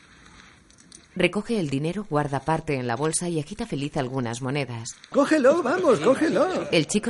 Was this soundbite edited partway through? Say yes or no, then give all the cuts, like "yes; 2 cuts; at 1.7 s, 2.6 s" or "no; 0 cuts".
yes; 2 cuts; at 1.0 s, 5.1 s